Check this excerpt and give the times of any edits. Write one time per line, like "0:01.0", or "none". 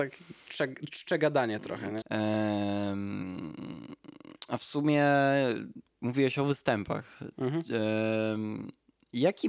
0:02.0